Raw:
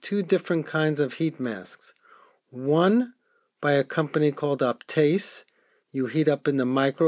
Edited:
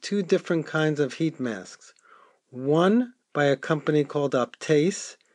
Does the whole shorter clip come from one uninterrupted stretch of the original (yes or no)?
no